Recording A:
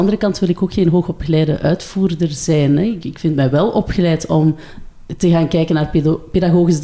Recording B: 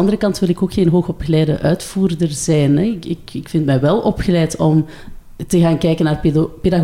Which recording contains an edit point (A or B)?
A